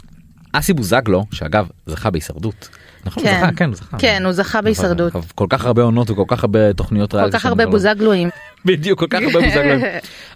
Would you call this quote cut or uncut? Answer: cut